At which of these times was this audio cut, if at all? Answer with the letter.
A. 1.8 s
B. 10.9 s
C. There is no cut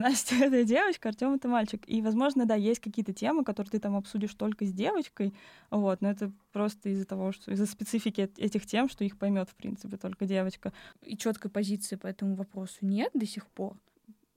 B